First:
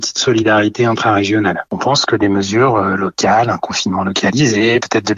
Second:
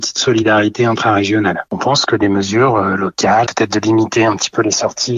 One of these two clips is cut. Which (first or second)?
second